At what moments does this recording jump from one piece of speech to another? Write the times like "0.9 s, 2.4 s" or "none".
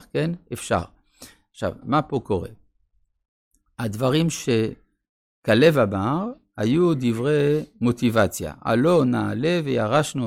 1.8 s